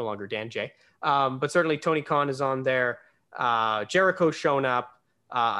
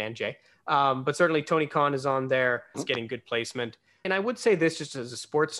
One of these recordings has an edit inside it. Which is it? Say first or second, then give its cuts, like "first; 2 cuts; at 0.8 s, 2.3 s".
second; 2 cuts; at 2.7 s, 4.0 s